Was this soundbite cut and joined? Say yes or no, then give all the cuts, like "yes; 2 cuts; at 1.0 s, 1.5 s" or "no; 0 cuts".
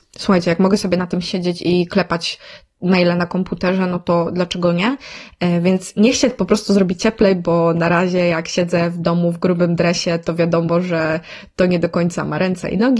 no; 0 cuts